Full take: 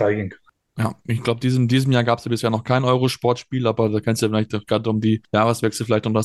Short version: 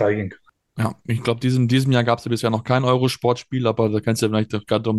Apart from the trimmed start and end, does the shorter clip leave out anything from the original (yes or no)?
no